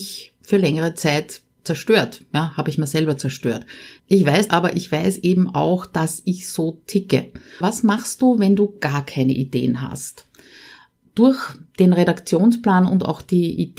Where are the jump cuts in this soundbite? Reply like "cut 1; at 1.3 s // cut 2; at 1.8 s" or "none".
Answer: cut 1; at 4.5 s // cut 2; at 7.6 s